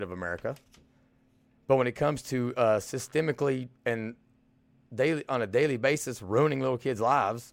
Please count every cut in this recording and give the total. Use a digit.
2